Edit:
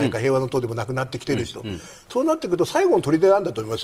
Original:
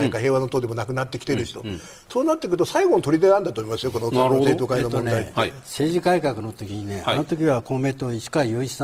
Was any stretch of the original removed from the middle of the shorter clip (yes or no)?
no